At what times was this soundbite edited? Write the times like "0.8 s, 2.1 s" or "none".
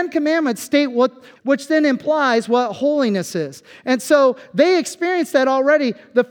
1.4 s